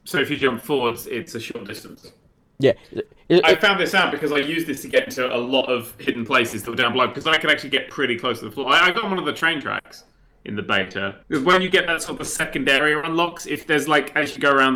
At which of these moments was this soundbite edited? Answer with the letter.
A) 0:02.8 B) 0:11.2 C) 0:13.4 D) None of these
B